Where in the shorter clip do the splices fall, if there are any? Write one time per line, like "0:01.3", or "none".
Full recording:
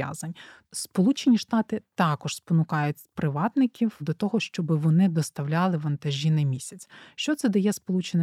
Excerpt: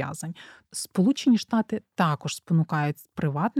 none